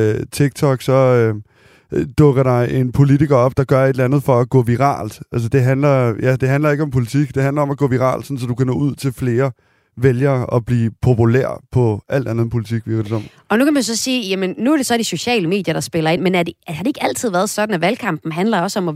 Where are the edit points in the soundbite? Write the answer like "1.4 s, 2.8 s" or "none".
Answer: none